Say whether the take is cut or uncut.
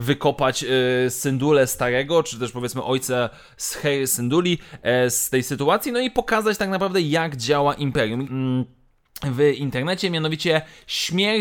cut